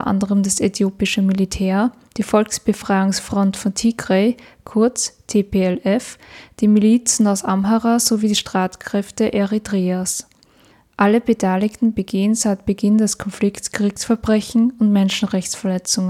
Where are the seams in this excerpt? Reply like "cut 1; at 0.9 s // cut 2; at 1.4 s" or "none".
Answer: none